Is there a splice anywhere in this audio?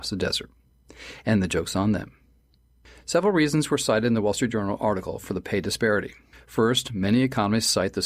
no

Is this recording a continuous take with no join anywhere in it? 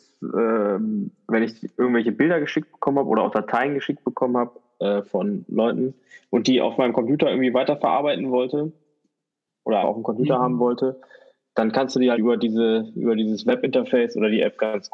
no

